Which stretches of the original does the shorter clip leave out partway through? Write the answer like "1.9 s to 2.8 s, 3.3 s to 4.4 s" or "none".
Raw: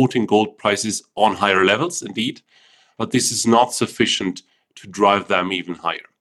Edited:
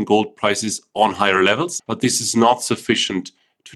2.0 s to 2.9 s